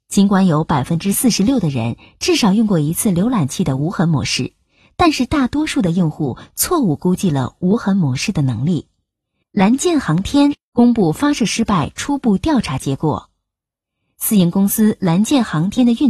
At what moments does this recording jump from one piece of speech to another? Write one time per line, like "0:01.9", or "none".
0:09.4